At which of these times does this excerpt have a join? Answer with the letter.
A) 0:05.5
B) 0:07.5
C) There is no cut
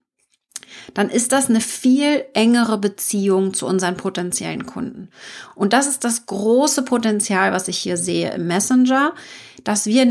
C